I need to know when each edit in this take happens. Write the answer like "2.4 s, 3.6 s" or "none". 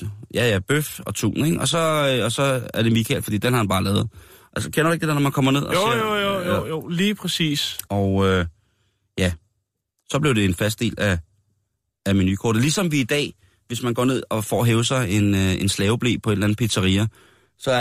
7.9 s